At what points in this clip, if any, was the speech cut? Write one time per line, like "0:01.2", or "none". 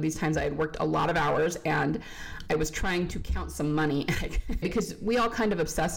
0:04.6

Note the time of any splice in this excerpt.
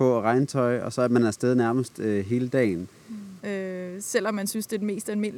0:03.4

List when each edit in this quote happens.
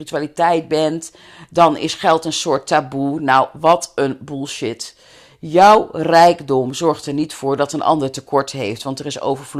none

